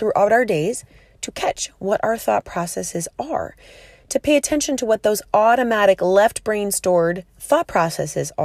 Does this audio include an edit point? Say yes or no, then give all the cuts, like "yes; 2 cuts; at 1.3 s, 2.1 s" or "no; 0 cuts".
yes; 1 cut; at 7.3 s